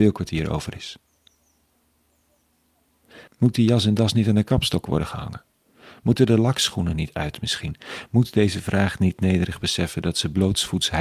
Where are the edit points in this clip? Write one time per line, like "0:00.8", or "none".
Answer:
0:03.3